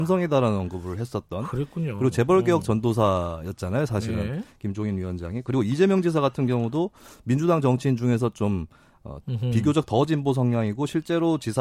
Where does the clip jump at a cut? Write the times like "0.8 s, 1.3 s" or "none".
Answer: 9.2 s

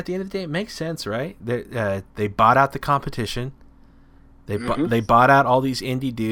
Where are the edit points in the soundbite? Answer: none

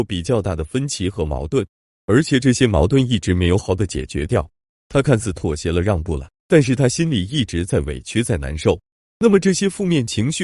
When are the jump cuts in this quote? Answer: 3.6 s

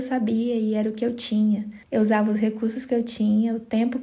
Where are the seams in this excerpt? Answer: 1.8 s

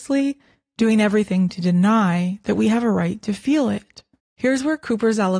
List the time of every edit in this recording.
4.2 s

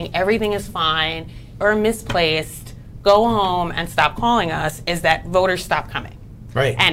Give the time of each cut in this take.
1.6 s

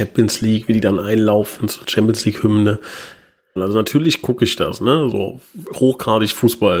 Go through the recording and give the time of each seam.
3.6 s

